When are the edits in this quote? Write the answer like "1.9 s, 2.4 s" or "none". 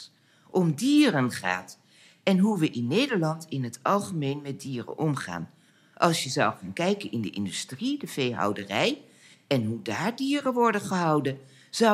none